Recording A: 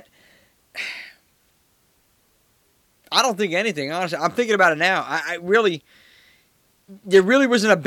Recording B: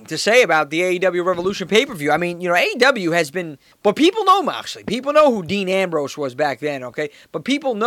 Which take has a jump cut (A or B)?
B